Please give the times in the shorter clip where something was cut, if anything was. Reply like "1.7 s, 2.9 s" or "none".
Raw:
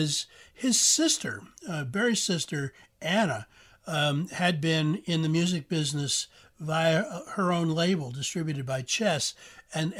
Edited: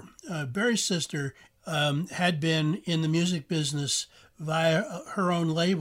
1.6 s